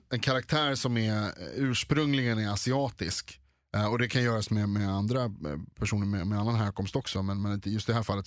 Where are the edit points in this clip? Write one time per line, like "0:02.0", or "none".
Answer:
none